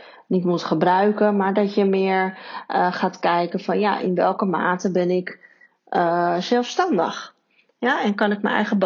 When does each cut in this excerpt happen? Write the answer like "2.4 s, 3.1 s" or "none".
none